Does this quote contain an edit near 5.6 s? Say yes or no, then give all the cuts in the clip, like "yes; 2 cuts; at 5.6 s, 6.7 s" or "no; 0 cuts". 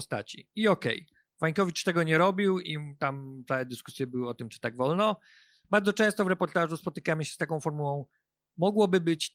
yes; 1 cut; at 5.6 s